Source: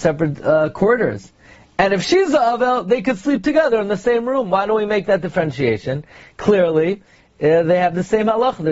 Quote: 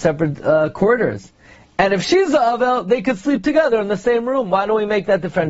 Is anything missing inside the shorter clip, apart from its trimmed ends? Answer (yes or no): no